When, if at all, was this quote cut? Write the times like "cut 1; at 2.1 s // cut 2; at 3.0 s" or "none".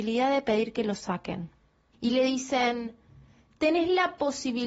cut 1; at 1.9 s